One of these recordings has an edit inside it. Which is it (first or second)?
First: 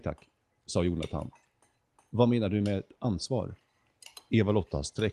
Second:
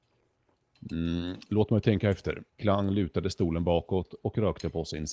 second